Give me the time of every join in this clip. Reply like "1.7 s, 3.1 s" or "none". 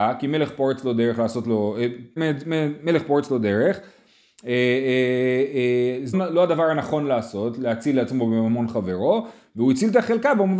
2.2 s, 6.1 s

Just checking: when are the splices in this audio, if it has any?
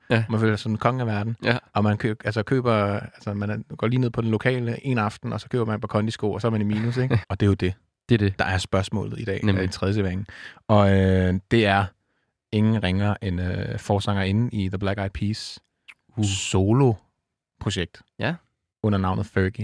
7.2 s

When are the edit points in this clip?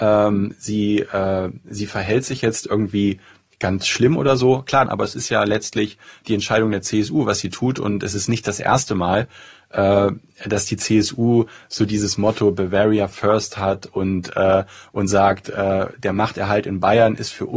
4.9 s

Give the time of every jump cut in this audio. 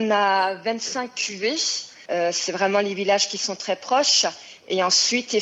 2.1 s

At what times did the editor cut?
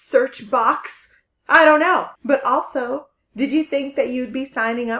2.2 s

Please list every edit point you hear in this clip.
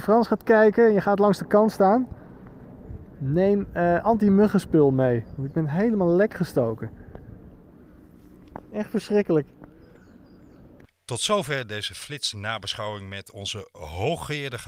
none

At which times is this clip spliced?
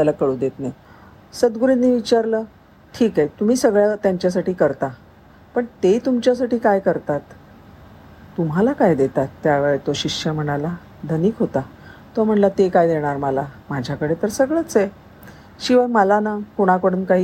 9.4 s, 13.6 s

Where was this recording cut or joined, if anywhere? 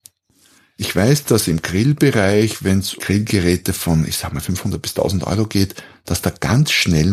3.0 s

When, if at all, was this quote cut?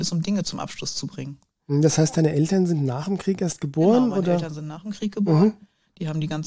none

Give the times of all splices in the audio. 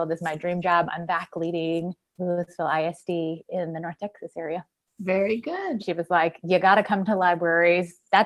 5.8 s

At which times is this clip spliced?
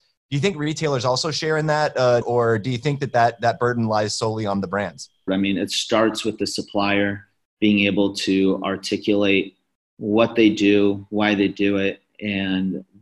2.2 s, 5.3 s

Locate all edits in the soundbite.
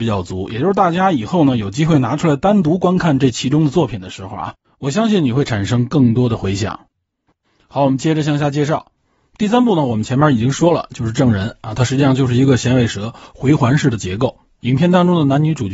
none

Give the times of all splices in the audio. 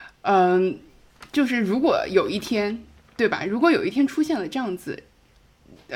none

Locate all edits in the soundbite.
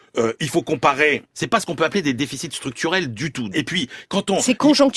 1.3 s, 3.5 s

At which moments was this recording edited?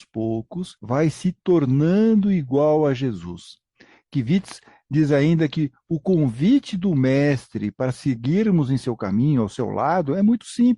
none

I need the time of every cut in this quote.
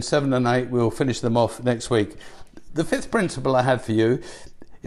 none

